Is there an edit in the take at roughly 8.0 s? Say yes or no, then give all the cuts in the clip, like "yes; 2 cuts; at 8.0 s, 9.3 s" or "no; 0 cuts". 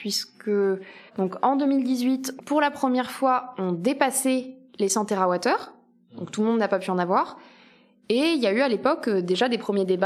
no; 2 cuts; at 1.1 s, 2.4 s